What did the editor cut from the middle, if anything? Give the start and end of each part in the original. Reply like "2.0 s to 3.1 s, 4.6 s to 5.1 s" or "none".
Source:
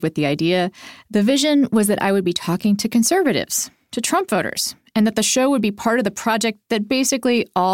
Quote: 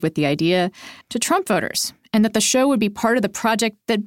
1.0 s to 3.8 s